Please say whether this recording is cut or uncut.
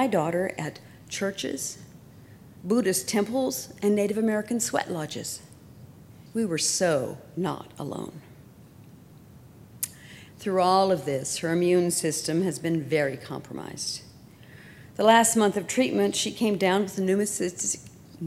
cut